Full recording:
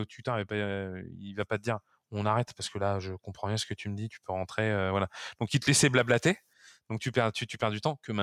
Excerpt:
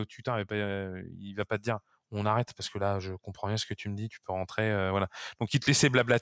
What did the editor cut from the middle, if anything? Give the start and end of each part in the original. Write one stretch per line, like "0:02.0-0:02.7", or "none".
none